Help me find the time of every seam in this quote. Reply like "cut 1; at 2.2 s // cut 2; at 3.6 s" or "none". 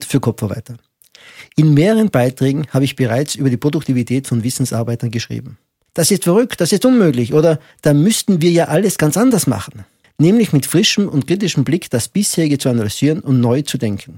cut 1; at 5.9 s // cut 2; at 10.0 s